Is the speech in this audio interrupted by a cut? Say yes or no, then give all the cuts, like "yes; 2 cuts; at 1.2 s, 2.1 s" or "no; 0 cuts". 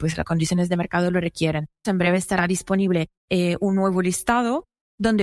yes; 2 cuts; at 1.8 s, 3.2 s